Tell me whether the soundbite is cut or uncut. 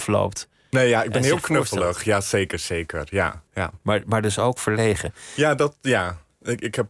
cut